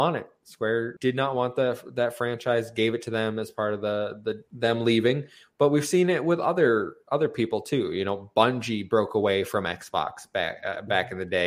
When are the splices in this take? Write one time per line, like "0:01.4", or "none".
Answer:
0:01.0
0:04.5